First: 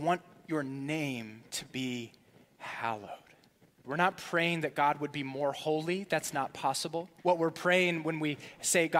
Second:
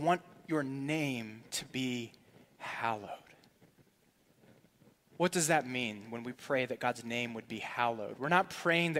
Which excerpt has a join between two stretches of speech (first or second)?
first